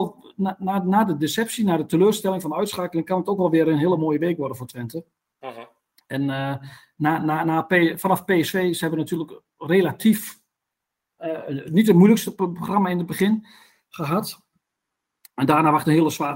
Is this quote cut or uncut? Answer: uncut